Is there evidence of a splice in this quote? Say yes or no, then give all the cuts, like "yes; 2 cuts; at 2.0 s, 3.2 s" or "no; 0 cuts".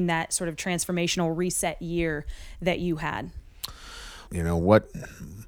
yes; 1 cut; at 4.3 s